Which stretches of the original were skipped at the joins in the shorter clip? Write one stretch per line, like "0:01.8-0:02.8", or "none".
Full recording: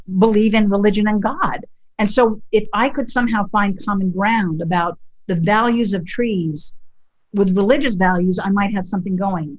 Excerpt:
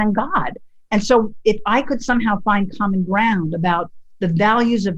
none